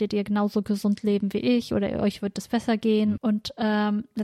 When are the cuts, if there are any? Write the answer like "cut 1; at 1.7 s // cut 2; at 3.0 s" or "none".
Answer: cut 1; at 3.2 s